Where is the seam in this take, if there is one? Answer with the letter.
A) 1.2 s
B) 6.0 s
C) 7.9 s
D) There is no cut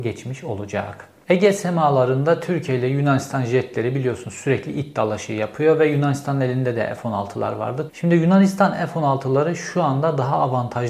C